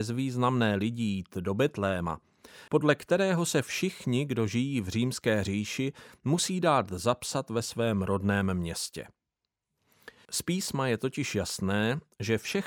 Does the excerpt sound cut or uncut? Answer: cut